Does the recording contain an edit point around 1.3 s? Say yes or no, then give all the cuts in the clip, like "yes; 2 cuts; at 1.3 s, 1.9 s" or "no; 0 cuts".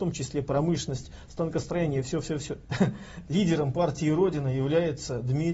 no; 1 cut; at 2.6 s